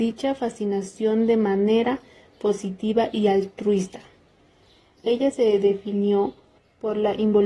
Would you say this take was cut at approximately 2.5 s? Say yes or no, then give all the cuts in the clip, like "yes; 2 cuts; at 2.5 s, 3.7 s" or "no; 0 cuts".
no; 1 cut; at 5.0 s